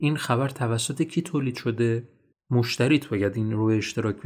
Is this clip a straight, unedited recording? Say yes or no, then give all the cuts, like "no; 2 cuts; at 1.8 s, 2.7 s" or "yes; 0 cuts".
no; 1 cut; at 2.3 s